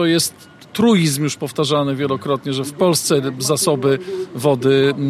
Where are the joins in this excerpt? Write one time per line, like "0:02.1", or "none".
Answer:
none